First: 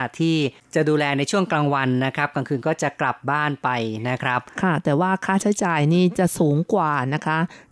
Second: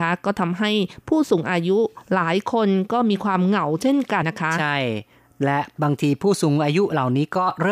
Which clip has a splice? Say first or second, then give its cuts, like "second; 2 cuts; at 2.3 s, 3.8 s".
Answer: second; 1 cut; at 4.2 s